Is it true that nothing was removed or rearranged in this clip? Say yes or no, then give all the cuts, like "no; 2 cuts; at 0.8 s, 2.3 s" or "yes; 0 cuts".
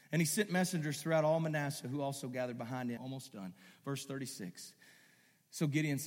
no; 1 cut; at 3.0 s